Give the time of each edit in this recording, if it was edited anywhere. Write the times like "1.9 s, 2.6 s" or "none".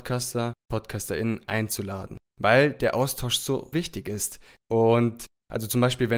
3.7 s